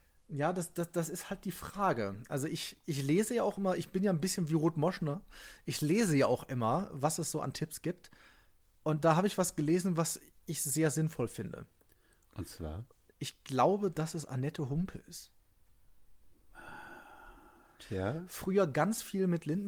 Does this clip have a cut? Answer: yes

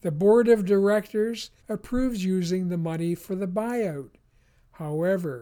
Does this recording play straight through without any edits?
no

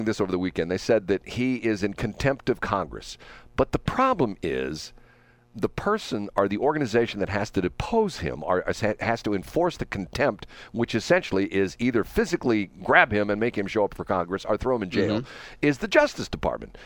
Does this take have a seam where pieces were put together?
no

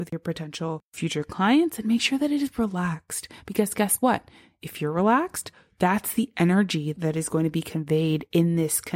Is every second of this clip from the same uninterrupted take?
yes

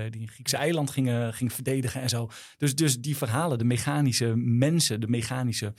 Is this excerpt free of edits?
yes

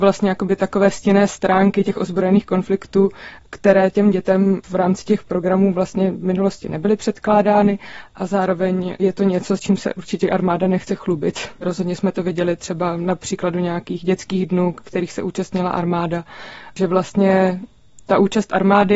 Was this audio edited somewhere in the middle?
yes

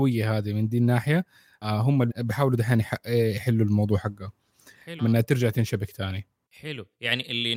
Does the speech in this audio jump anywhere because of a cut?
yes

